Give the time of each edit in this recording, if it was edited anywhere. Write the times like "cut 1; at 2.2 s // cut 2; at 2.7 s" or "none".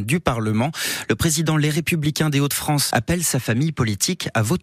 cut 1; at 2.9 s